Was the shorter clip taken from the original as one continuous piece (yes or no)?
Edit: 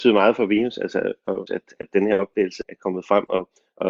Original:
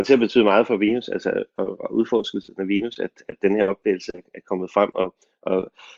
no